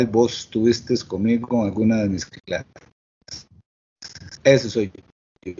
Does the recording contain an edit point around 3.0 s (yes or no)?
no